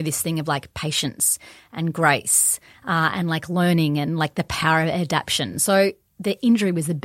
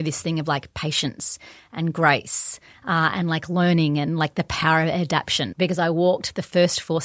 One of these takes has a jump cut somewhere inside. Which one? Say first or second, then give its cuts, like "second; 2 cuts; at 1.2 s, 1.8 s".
second; 1 cut; at 5.5 s